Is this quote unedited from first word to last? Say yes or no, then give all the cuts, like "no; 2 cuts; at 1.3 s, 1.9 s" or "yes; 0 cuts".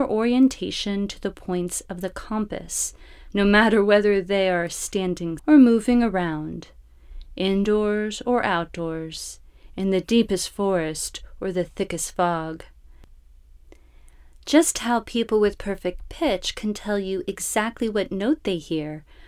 no; 1 cut; at 5.4 s